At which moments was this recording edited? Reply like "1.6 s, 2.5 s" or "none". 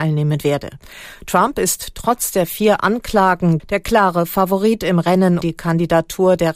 3.6 s, 5.4 s